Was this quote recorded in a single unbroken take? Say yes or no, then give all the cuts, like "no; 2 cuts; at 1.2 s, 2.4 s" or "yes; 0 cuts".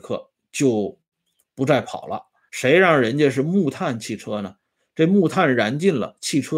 yes; 0 cuts